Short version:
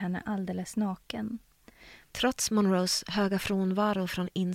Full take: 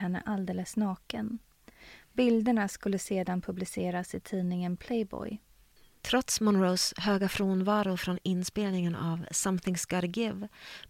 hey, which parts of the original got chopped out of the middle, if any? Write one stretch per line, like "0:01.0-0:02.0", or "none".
0:02.1-0:06.0